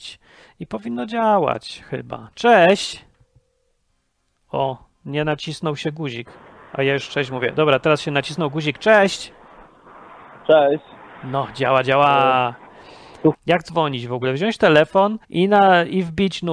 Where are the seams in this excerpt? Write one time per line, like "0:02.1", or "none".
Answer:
0:13.3
0:15.2